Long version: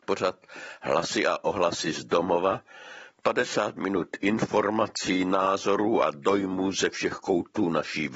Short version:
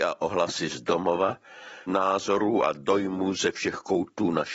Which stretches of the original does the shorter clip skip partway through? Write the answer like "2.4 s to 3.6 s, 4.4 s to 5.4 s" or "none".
3.1 s to 5.2 s